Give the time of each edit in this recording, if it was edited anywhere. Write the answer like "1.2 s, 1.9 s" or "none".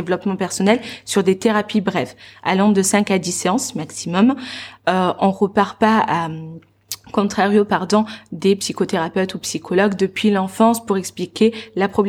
none